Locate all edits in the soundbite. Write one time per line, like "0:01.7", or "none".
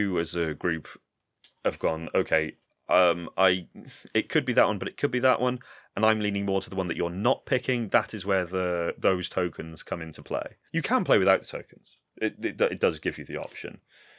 0:10.7